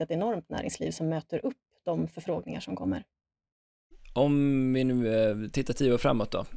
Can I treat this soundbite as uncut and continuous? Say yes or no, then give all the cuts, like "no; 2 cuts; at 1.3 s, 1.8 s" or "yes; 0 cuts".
yes; 0 cuts